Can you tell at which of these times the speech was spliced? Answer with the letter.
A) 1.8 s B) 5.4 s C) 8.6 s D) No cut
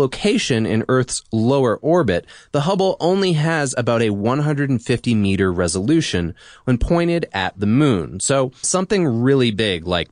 C